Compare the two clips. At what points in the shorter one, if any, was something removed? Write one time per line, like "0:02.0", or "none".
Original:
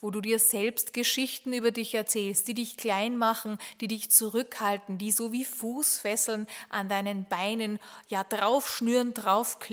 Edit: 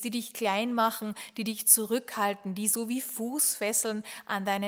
none